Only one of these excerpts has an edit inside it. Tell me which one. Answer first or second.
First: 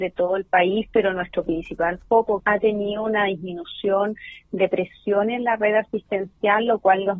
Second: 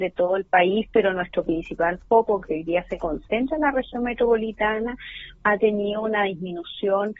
first